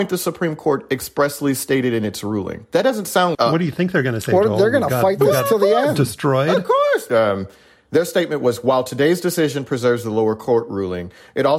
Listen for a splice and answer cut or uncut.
cut